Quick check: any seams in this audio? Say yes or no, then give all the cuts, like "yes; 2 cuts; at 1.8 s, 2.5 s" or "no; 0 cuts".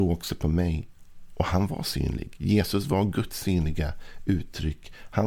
no; 0 cuts